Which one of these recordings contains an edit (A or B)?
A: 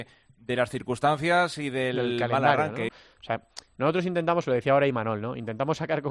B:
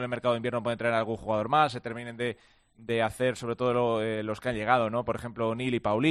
A